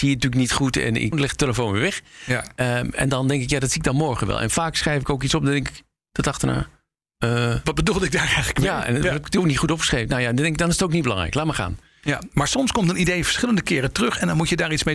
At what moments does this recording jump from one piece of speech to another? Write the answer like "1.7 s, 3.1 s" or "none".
1.1 s